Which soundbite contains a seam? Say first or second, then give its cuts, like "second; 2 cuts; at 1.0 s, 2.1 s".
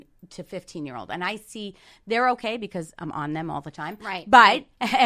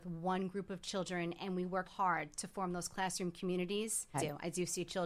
second; 2 cuts; at 1.8 s, 4.1 s